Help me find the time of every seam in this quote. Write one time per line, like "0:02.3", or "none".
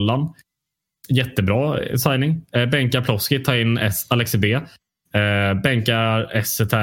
none